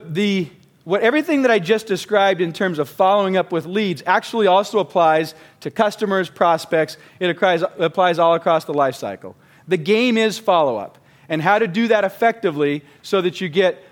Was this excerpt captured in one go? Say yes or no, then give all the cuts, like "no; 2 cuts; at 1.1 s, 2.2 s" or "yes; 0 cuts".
yes; 0 cuts